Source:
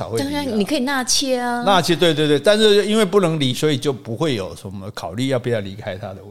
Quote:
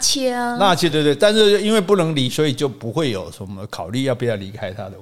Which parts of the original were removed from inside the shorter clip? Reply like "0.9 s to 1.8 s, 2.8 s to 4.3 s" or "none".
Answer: 2.0 s to 2.1 s